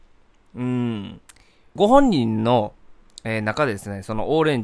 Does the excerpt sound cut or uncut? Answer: cut